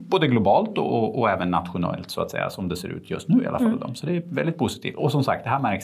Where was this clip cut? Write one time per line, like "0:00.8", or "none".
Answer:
none